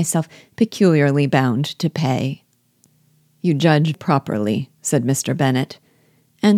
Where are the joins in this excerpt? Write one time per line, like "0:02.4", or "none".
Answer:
0:03.9

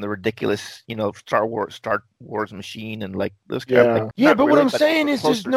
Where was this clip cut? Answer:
0:04.1

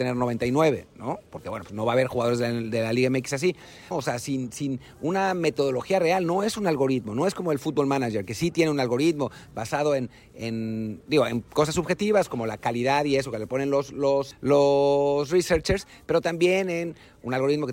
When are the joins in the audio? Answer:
0:03.9
0:14.3

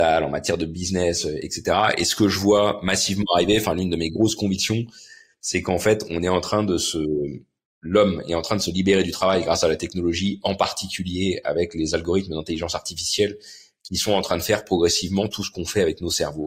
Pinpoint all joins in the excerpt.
none

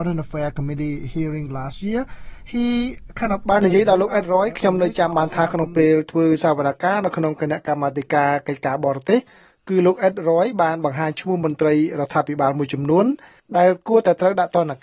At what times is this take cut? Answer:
none

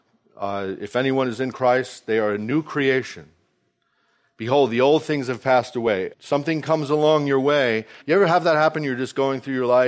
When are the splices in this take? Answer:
0:06.1
0:08.0

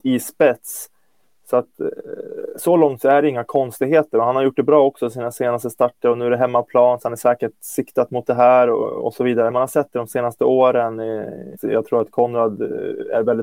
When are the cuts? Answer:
0:09.5
0:11.6

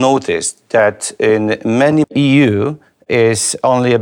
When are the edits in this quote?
0:02.0

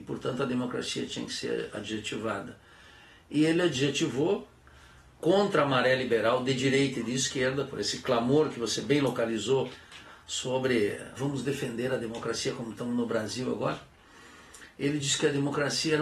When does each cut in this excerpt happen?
0:11.2

